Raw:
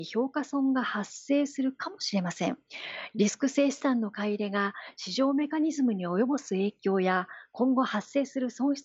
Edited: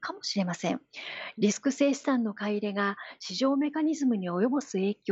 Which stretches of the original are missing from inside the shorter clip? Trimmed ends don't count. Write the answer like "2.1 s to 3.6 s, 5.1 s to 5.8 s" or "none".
none